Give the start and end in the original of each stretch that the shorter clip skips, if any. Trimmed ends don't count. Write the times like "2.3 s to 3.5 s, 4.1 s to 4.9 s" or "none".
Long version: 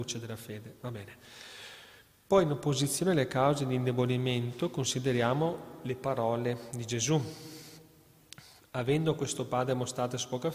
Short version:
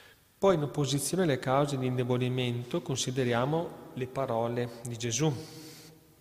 none